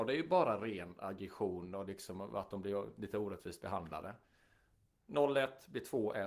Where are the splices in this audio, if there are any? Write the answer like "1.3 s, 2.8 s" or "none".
none